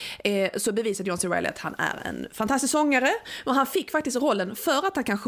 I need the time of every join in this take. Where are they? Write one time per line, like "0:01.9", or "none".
none